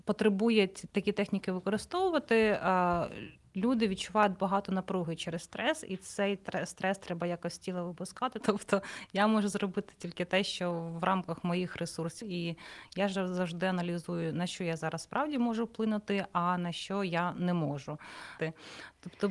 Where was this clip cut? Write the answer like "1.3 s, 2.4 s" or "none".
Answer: 8.4 s, 12.2 s, 18.4 s